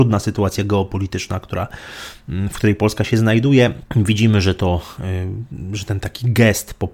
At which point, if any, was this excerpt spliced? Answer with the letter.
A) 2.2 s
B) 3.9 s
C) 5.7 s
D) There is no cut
B